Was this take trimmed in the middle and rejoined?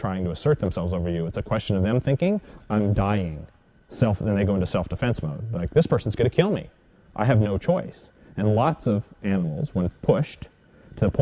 no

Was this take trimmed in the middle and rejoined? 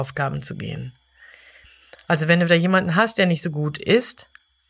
no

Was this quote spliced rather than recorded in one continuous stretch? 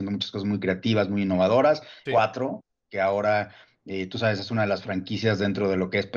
yes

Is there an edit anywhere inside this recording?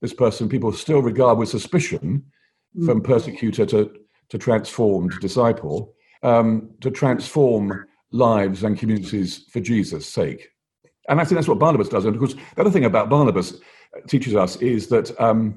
yes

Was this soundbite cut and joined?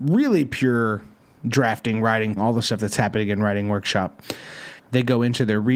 yes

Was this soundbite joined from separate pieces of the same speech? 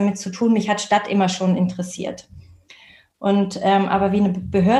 no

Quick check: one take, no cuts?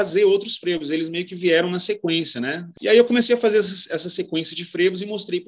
no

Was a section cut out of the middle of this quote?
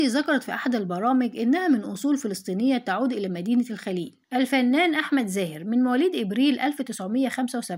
yes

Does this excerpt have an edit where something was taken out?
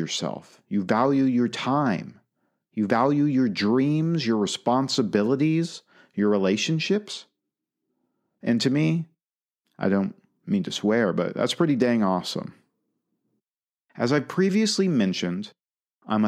no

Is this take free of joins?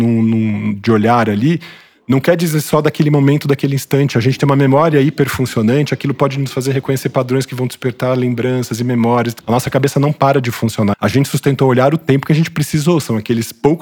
no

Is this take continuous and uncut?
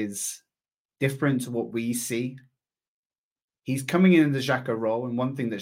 yes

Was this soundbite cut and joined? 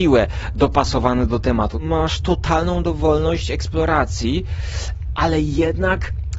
yes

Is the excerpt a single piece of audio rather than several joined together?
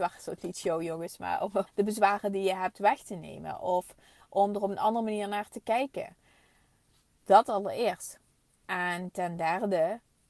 no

